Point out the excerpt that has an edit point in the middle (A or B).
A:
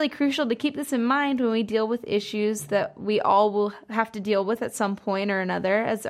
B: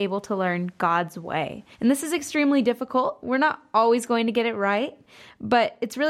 B